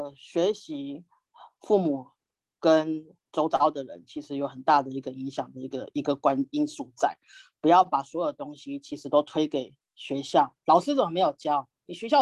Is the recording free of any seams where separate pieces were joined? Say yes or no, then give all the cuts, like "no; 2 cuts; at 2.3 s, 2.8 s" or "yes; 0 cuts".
yes; 0 cuts